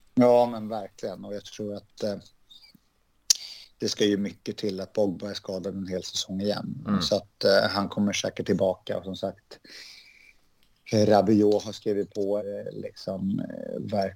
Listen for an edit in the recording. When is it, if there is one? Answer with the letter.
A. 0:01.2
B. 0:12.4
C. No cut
B